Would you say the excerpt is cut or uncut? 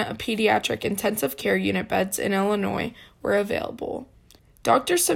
uncut